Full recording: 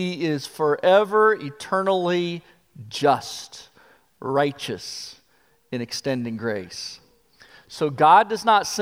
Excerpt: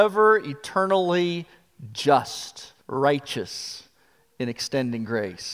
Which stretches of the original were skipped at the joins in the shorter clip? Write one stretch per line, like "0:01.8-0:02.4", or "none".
0:03.7-0:04.1